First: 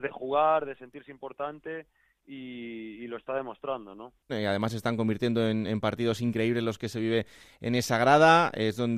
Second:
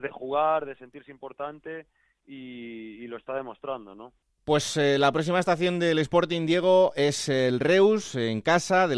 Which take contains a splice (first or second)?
first